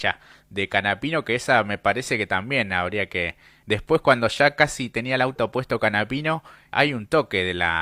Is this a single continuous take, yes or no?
no